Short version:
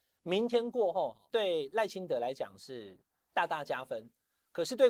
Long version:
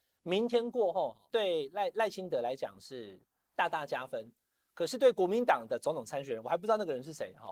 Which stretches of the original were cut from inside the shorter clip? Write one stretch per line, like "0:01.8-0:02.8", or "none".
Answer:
0:01.7-0:01.9